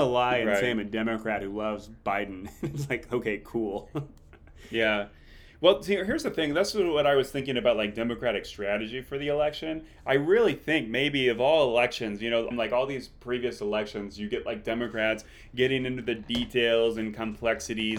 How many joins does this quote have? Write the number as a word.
one